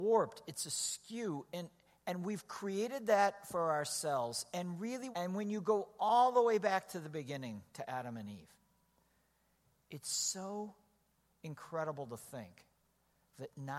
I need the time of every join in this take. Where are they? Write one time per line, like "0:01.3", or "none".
0:05.1